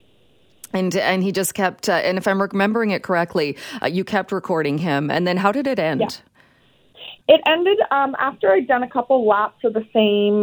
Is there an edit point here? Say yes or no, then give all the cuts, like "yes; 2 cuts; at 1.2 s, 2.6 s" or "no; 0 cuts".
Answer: no; 0 cuts